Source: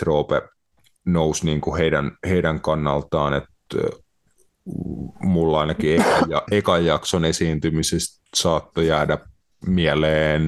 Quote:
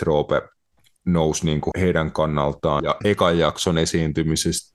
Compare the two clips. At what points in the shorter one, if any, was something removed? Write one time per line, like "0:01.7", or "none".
0:01.7
0:02.8

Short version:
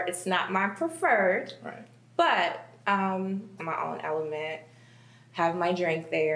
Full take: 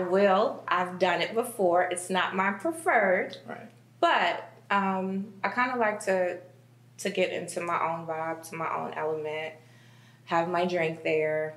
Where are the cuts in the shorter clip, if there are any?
0:03.6

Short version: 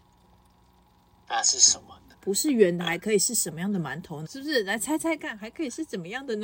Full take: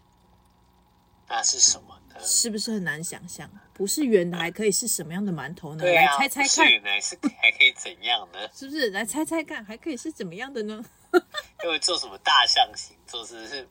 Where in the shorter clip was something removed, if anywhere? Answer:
0:02.1
0:04.2

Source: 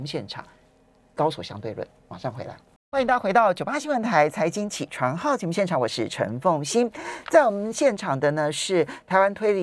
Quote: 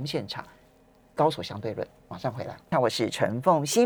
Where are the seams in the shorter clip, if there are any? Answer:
0:02.7

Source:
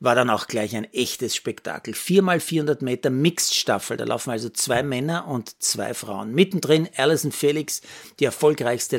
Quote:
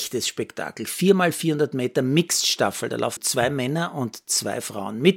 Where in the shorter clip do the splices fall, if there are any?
0:03.2

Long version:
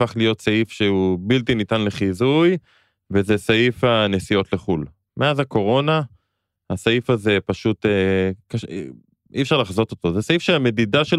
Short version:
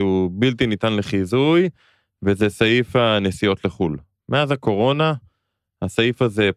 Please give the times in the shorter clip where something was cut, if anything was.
none

